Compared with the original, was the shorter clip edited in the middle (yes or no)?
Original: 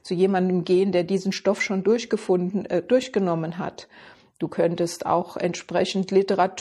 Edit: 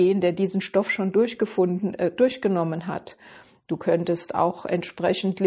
no